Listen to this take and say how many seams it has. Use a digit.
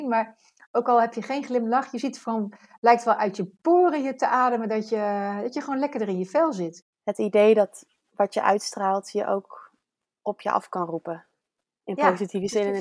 1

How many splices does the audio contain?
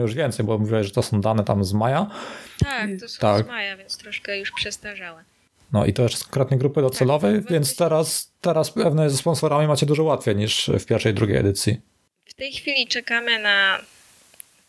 0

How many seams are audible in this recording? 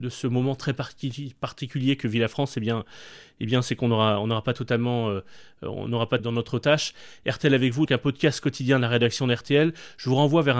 2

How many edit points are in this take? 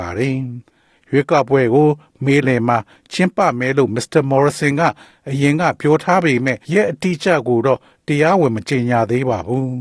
2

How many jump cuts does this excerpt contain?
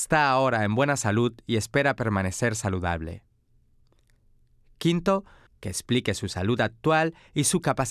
1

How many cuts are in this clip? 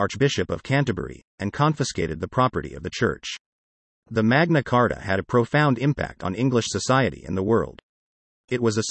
1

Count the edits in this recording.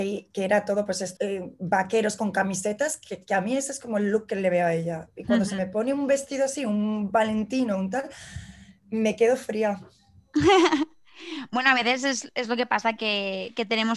1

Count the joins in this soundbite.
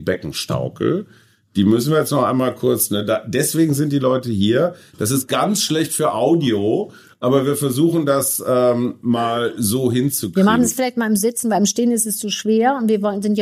0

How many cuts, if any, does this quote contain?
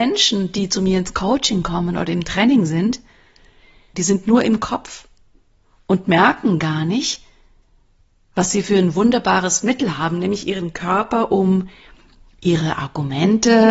1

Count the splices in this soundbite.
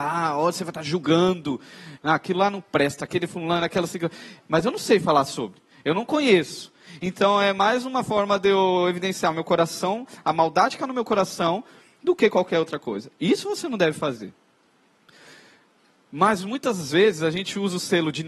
1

